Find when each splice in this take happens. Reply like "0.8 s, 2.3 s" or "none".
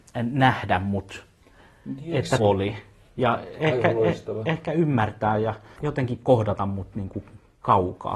2.4 s, 5.8 s

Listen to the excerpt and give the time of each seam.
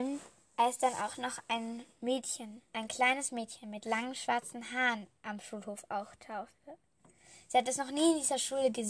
2.7 s

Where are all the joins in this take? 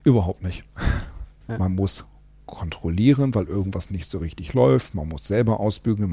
1.4 s

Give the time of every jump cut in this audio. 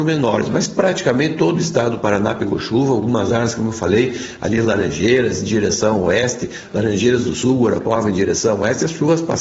none

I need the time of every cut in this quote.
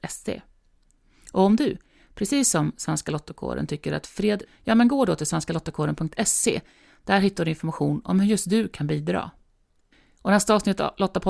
4.5 s

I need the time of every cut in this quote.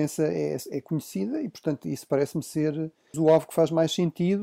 3.1 s

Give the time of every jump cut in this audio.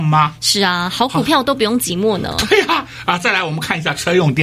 none

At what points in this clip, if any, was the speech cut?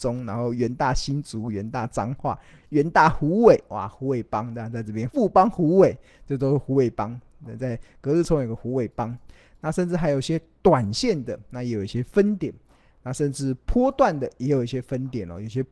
5.1 s

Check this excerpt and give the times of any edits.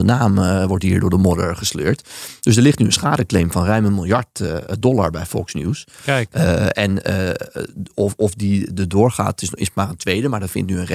none

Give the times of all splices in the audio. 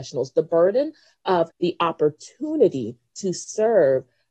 1.5 s

